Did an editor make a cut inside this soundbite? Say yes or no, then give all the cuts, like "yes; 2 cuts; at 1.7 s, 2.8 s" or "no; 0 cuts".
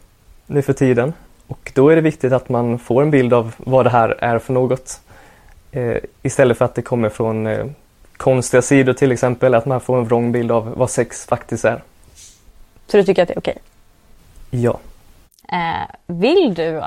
yes; 1 cut; at 15.4 s